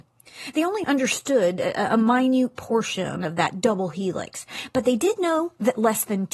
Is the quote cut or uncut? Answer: uncut